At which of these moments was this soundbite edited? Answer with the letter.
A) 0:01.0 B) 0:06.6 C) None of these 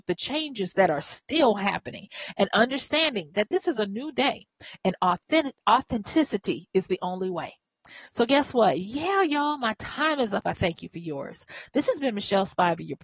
C